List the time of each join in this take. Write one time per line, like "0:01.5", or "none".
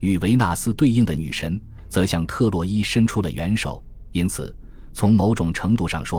none